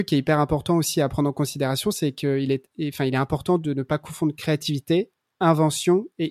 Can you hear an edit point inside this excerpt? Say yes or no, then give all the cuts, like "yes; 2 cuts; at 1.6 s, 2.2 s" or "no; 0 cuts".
no; 0 cuts